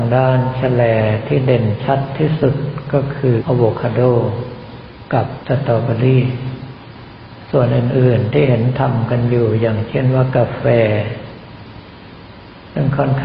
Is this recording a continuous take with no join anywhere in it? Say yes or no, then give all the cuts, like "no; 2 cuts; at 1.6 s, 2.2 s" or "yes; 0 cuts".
no; 1 cut; at 3.4 s